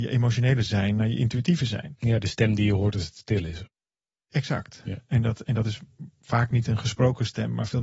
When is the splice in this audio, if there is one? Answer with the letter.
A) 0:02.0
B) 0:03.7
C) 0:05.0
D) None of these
D